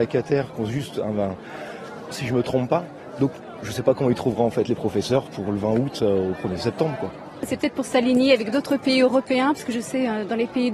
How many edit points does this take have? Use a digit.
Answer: 1